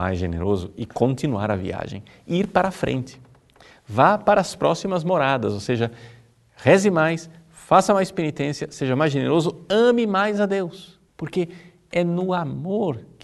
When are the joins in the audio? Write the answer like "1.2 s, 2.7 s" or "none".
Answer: 11.1 s